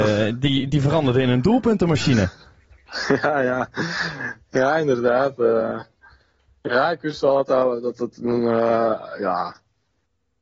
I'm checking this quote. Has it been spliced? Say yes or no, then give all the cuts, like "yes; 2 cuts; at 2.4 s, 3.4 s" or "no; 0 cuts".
no; 0 cuts